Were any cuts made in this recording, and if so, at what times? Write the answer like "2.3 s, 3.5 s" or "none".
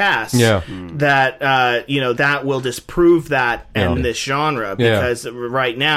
2.2 s, 4.0 s